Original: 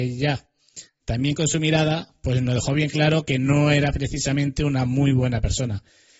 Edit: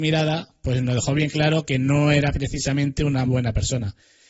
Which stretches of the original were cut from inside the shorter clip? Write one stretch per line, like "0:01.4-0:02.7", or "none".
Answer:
0:04.9-0:05.1